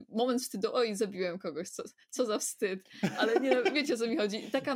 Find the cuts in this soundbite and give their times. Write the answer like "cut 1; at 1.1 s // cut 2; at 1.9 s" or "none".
none